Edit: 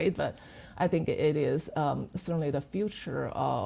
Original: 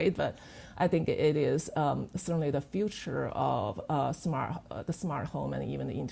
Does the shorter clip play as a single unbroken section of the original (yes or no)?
yes